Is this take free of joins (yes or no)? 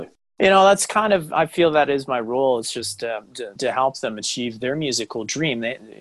no